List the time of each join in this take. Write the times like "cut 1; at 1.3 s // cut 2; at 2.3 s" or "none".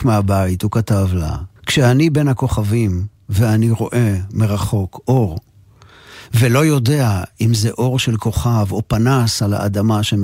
cut 1; at 1.6 s